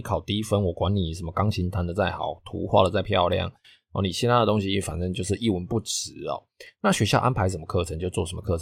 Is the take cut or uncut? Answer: uncut